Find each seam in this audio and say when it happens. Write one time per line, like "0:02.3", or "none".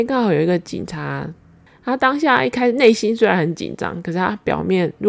0:01.7